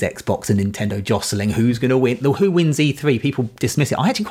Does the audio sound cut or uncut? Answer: uncut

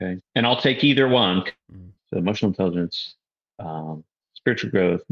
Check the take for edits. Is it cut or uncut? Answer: cut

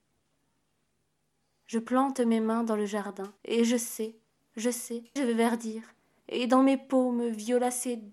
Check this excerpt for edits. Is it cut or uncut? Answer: cut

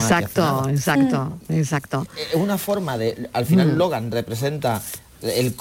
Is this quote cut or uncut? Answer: uncut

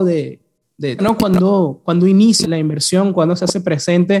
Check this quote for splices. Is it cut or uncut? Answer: cut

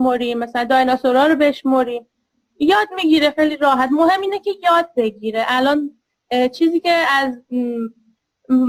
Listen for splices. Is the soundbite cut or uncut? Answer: uncut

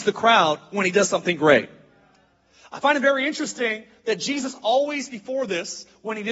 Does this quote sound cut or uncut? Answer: uncut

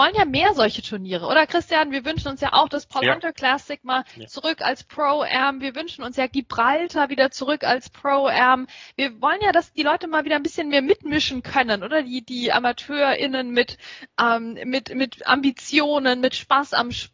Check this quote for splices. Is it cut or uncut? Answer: uncut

